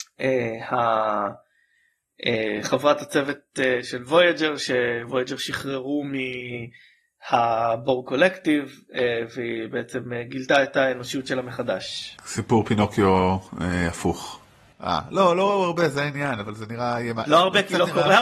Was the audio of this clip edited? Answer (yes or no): yes